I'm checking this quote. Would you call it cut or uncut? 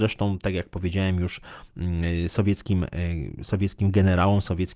uncut